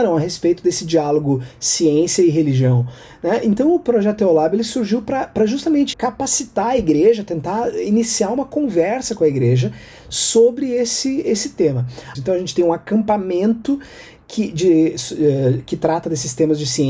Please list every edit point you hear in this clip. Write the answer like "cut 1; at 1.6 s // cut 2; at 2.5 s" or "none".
cut 1; at 5.9 s // cut 2; at 12.1 s